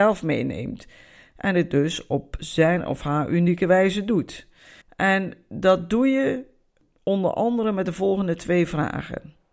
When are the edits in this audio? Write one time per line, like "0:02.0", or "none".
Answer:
0:04.8

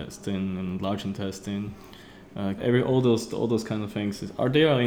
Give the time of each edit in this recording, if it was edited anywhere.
0:02.6

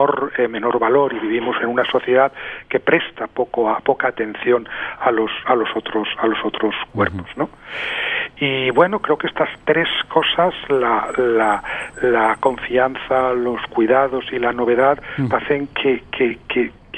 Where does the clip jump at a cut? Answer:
0:15.3

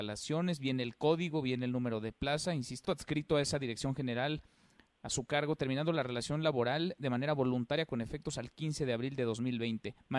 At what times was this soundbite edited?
0:02.9

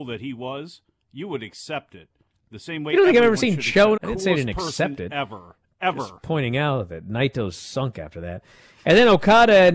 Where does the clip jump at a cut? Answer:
0:04.0

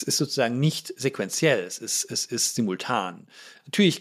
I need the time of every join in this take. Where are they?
none

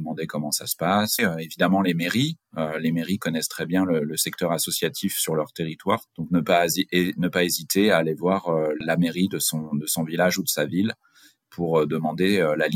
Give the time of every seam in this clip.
0:01.2
0:06.1
0:08.8

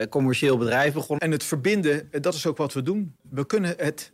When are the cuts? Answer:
0:01.2

